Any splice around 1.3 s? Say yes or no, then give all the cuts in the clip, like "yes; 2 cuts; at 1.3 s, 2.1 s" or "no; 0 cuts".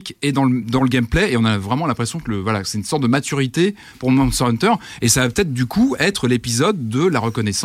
no; 0 cuts